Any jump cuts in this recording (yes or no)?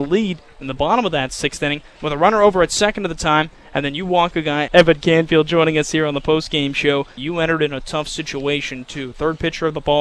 yes